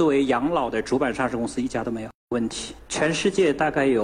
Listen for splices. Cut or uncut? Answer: cut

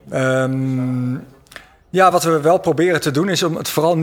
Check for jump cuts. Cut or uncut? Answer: uncut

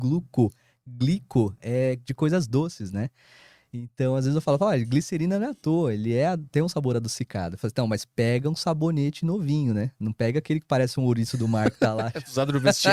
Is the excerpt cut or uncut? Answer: uncut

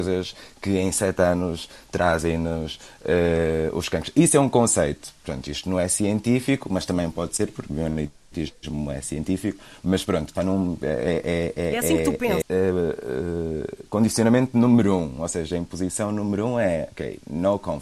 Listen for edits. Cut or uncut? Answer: cut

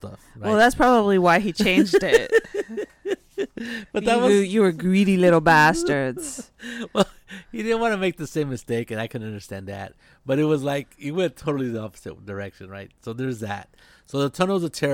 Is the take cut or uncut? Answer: uncut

